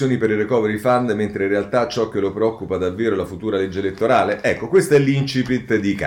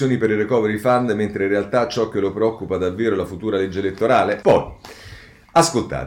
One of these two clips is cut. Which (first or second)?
second